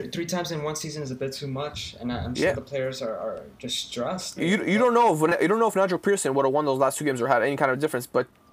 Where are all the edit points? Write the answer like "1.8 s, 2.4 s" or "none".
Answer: 4.4 s